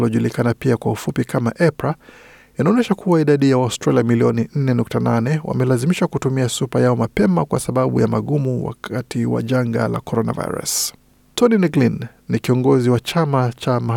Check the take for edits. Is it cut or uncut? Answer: uncut